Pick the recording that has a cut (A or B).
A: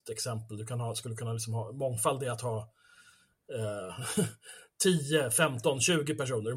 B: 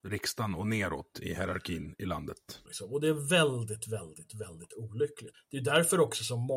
B